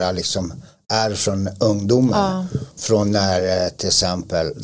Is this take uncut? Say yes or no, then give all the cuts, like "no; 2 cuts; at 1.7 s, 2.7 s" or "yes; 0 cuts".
yes; 0 cuts